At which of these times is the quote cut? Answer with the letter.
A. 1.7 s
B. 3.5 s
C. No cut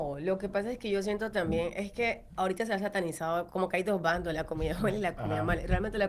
B